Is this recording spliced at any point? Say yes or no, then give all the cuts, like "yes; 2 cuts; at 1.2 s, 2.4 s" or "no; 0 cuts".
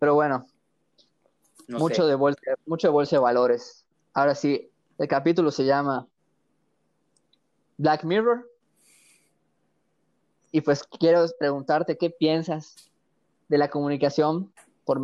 no; 0 cuts